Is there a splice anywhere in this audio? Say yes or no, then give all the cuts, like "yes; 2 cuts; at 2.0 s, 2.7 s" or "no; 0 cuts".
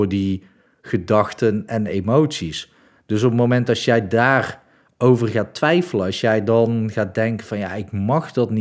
no; 0 cuts